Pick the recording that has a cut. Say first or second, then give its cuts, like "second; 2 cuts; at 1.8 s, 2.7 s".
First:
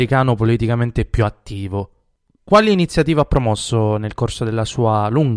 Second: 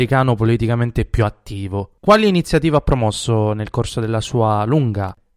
second; 1 cut; at 2.0 s